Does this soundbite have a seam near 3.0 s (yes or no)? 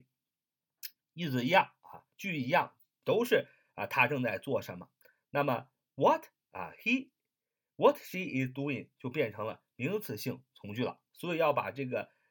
no